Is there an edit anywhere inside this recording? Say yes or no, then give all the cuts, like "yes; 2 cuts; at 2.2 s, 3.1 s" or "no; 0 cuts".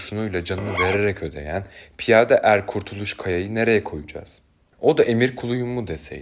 no; 0 cuts